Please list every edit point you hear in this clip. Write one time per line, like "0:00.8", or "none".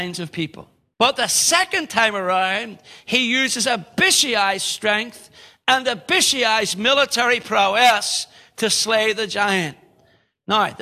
0:00.9